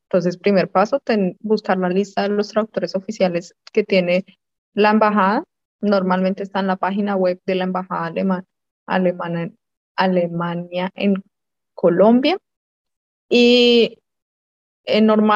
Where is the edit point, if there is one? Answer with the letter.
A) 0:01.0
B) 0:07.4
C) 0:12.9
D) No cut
B